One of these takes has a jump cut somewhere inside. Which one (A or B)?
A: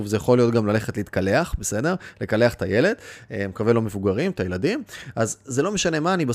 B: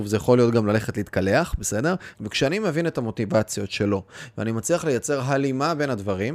B